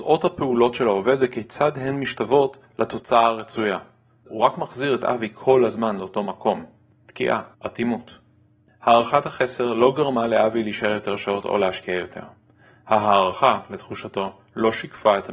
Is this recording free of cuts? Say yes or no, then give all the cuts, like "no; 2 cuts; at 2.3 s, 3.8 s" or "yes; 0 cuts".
no; 2 cuts; at 4.2 s, 7.5 s